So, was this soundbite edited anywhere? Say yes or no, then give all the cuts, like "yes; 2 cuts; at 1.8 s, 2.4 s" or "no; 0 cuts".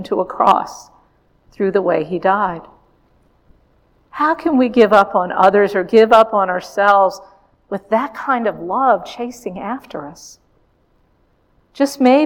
no; 0 cuts